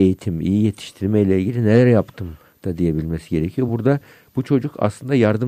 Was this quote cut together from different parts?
no; 0 cuts

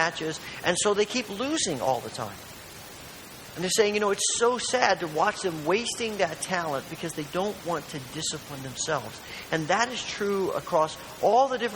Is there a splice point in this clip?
no; 0 cuts

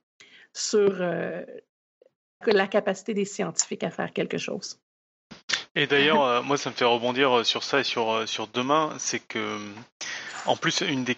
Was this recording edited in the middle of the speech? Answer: yes; 1 cut; at 2.4 s

